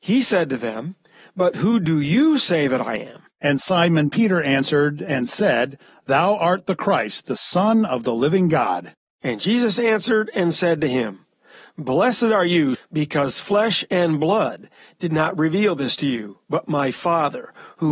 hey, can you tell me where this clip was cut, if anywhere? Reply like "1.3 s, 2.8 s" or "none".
12.7 s

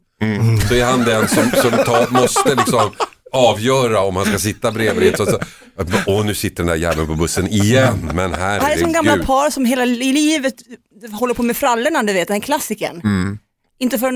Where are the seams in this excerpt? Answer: none

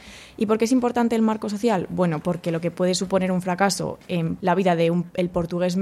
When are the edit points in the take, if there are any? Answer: 2.2 s, 4.4 s

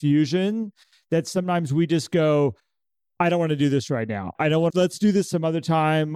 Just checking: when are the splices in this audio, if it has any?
4.7 s

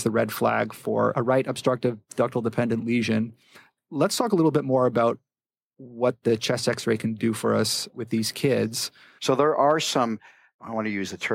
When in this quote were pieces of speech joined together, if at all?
9.2 s

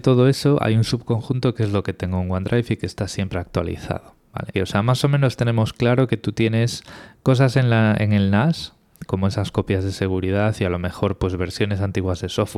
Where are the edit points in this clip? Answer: 4.5 s, 9.1 s

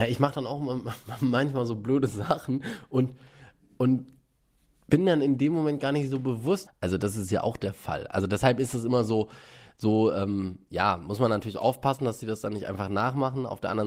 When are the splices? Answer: 6.7 s

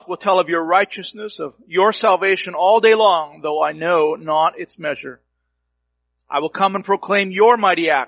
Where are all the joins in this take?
none

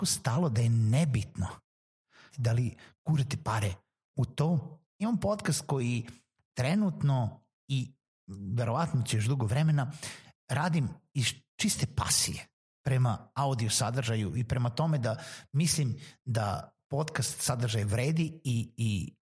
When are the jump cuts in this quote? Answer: 2.3 s, 4.8 s

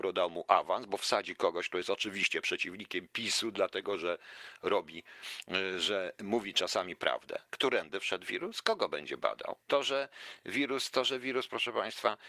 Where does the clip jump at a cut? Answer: 7.5 s, 9.6 s

